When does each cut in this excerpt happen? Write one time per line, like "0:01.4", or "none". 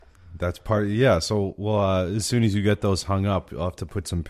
none